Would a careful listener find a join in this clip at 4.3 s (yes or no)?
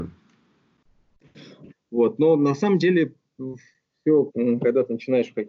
yes